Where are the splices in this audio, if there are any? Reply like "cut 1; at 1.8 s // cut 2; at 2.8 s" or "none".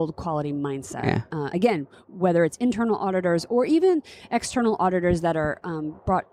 none